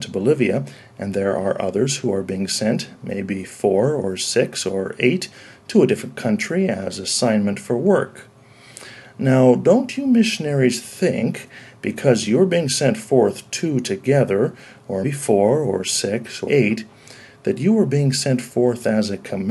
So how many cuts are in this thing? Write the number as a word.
three